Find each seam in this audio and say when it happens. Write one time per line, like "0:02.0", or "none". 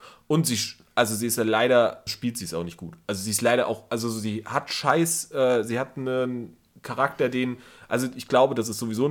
0:02.1